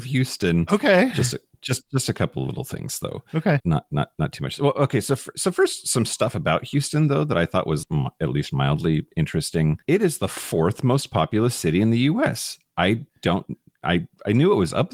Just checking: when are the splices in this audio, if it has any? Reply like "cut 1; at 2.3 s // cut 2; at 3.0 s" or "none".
cut 1; at 3.6 s // cut 2; at 7.8 s // cut 3; at 9.8 s